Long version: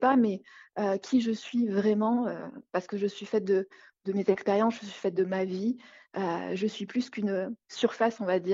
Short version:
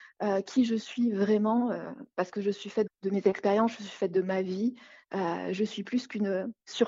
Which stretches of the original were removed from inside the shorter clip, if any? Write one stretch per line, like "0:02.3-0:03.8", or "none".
0:03.4-0:03.9